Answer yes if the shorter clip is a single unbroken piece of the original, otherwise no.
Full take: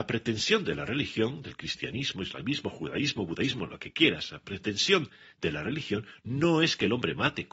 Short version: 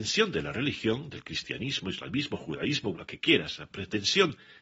no